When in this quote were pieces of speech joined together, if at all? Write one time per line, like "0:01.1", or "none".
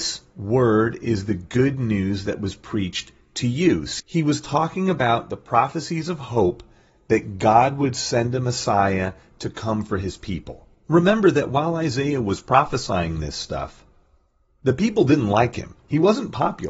0:04.0